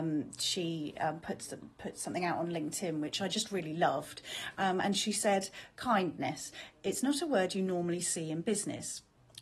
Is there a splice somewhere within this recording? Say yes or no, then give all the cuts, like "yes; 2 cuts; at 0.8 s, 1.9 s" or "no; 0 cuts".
no; 0 cuts